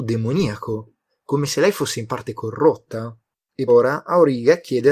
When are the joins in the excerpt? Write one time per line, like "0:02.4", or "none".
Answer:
0:03.7